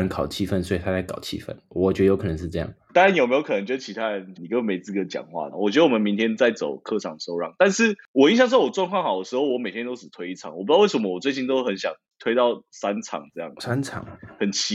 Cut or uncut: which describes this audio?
cut